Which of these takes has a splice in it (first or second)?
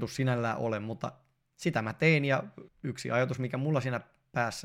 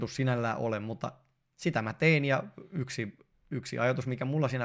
first